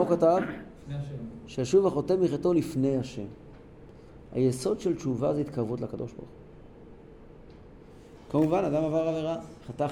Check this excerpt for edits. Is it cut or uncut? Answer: uncut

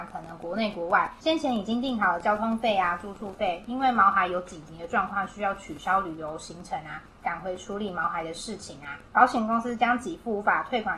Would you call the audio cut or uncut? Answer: uncut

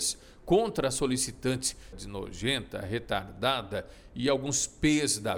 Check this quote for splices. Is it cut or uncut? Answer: cut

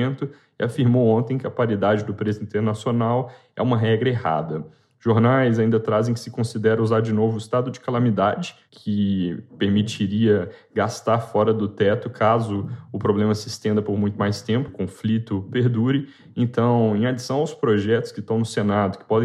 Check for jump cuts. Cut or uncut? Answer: cut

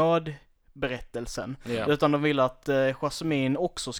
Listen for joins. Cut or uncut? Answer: uncut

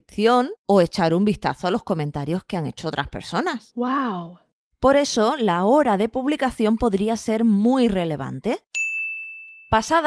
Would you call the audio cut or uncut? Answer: uncut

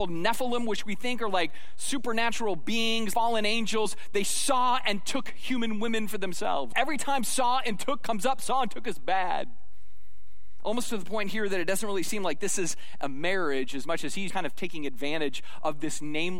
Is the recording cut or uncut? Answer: cut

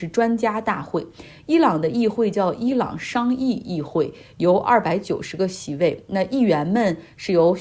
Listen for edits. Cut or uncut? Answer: uncut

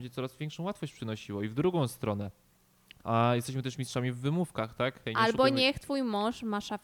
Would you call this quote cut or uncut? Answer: cut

